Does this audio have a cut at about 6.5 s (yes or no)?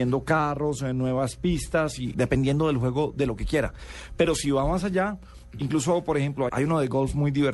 yes